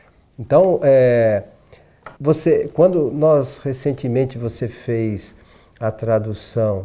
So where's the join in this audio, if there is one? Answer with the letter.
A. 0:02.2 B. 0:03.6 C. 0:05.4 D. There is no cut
A